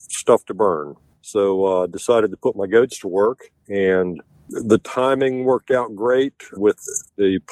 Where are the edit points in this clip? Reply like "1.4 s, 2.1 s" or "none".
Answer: 1.1 s, 6.6 s

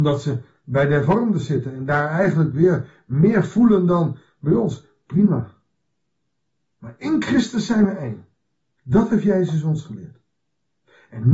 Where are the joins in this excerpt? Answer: 8.8 s

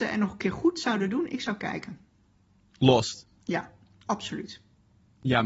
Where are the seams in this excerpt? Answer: none

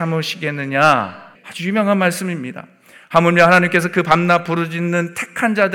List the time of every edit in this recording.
1.3 s

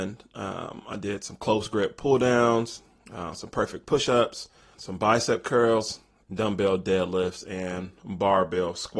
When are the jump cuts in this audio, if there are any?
4.7 s, 6.2 s

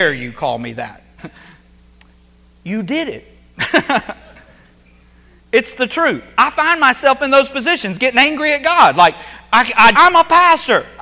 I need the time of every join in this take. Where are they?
1.2 s, 9.9 s

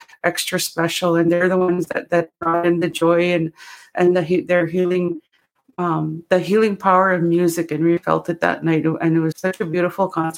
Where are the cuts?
8.0 s, 9.3 s

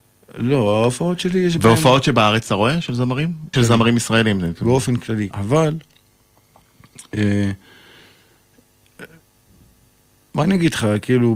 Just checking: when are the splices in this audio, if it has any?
3.5 s, 5.3 s

